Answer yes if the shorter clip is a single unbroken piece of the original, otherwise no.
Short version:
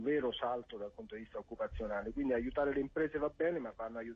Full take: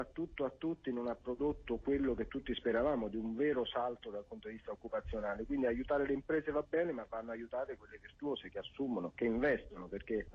yes